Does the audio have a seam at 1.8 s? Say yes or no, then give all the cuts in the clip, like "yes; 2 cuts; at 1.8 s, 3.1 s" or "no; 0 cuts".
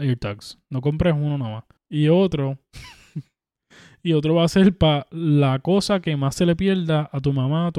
yes; 1 cut; at 1.8 s